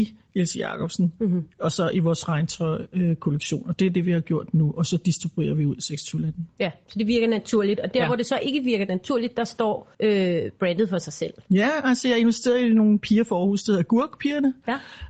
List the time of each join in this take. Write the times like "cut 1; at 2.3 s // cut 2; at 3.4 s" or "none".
cut 1; at 9.9 s